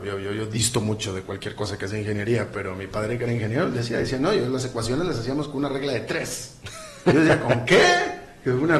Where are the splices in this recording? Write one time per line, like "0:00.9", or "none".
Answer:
none